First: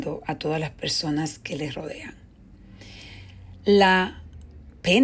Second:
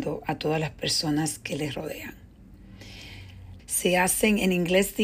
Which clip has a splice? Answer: second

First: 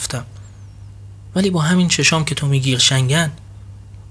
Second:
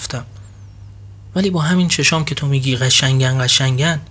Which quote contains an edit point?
first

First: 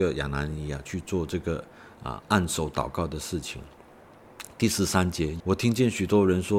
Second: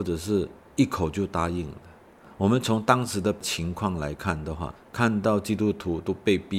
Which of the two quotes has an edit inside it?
first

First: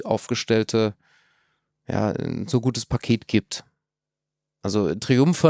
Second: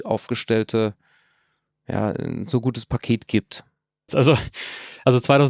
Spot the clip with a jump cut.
second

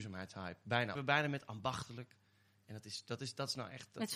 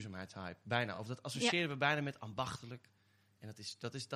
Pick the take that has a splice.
first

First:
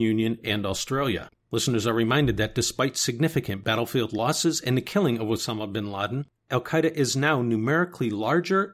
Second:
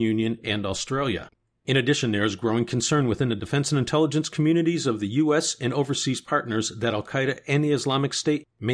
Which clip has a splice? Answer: first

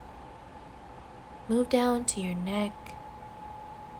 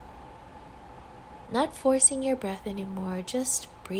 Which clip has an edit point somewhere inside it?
second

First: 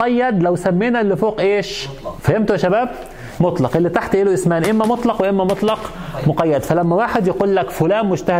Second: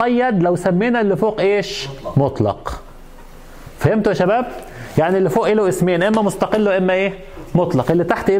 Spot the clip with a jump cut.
first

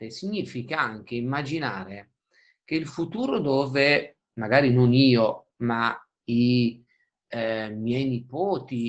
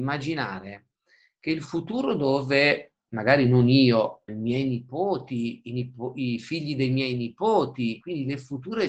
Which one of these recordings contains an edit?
second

